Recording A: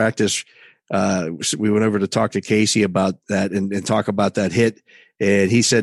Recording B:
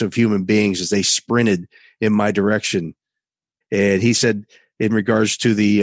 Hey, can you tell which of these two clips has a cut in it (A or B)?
B